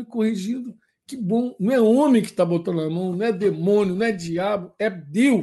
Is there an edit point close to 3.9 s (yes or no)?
no